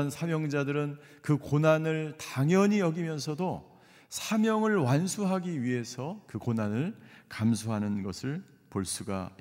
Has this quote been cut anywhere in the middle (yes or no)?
no